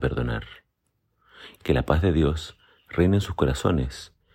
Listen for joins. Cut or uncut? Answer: cut